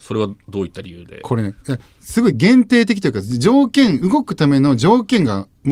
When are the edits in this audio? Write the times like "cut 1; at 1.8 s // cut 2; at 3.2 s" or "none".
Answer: none

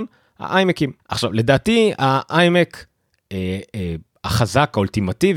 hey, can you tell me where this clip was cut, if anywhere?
cut 1; at 1.0 s

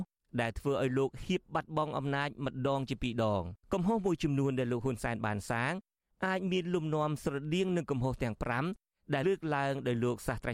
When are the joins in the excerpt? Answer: cut 1; at 3.6 s // cut 2; at 9.2 s

